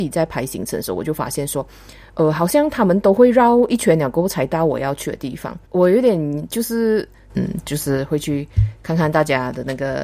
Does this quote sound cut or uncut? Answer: cut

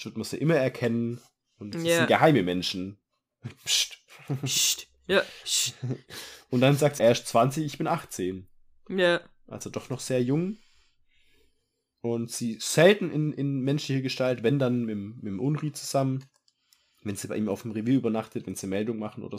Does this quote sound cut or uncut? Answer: cut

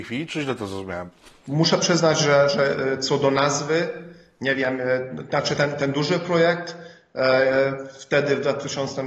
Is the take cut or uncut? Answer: uncut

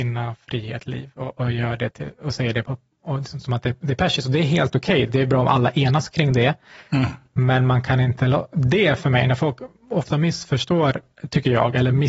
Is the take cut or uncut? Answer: uncut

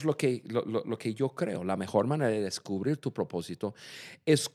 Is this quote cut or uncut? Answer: uncut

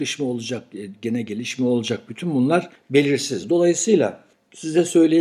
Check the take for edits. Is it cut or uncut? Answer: uncut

